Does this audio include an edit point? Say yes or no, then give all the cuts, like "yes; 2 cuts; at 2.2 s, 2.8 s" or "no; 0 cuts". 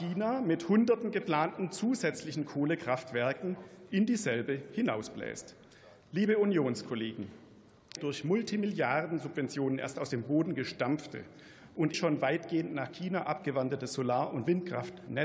yes; 2 cuts; at 8.0 s, 11.9 s